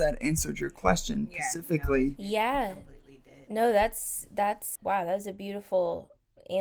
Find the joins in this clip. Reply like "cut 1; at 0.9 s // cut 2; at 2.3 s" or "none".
cut 1; at 4.8 s